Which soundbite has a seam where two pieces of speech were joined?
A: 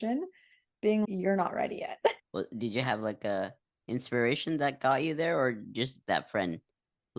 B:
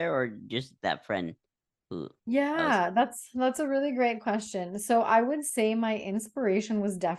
A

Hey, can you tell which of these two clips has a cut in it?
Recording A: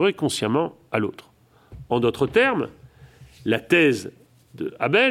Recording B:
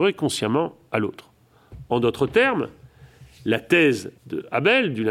B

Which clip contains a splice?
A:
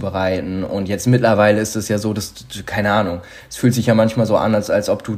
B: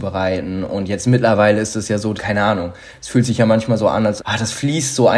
B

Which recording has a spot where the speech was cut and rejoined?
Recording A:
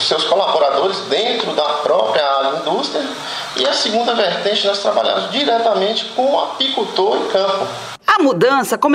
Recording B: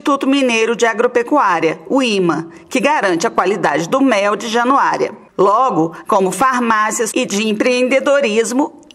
B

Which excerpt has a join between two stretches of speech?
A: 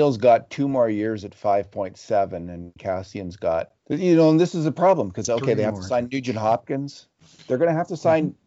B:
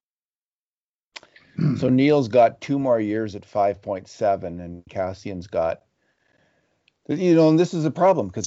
A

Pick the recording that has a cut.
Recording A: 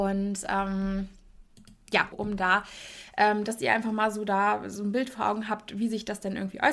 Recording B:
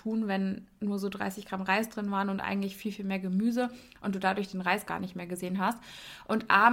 A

